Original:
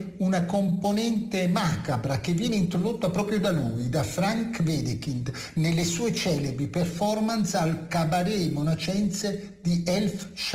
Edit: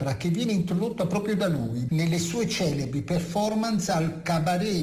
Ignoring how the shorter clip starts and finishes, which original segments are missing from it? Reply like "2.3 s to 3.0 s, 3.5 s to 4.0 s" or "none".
3.9 s to 5.5 s